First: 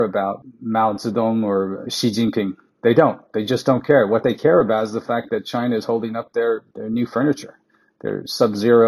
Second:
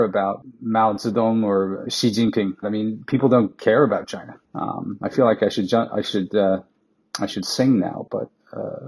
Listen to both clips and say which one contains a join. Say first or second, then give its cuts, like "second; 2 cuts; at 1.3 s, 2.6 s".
second; 2 cuts; at 2.6 s, 4.4 s